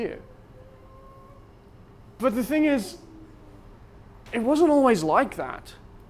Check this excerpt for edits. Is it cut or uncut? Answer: uncut